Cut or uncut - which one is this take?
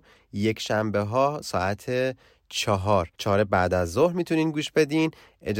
cut